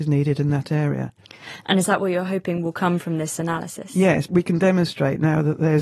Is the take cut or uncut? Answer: cut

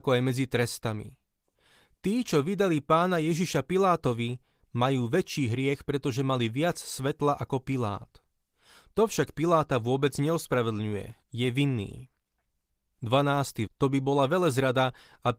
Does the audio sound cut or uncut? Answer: cut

